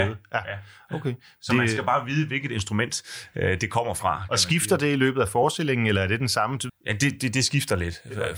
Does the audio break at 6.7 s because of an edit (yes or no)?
yes